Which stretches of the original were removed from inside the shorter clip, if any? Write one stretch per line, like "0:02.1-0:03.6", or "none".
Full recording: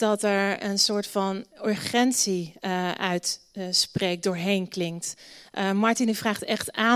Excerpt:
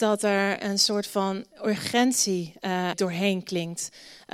0:02.9-0:04.2